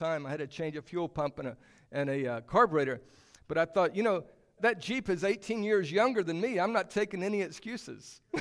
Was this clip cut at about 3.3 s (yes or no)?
no